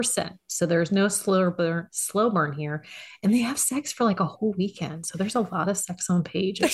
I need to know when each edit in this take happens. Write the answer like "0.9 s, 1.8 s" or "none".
none